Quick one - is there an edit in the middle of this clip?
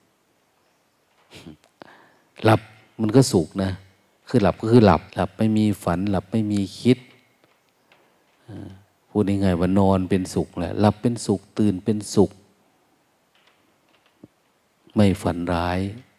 yes; 1 cut; at 5.1 s

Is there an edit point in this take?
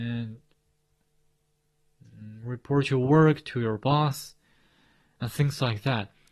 no; 0 cuts

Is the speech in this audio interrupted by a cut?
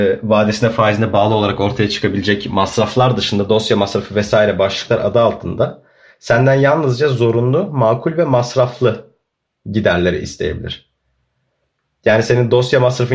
no; 0 cuts

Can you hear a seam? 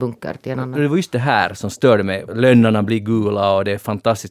yes; 1 cut; at 2.3 s

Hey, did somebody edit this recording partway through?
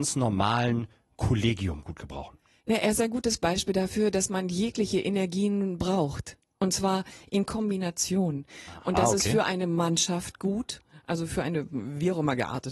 no; 0 cuts

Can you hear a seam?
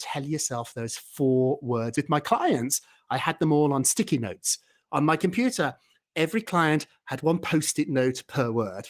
no; 0 cuts

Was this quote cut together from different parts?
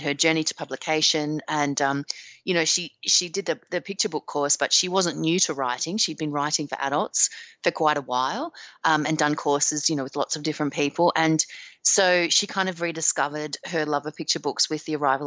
no; 0 cuts

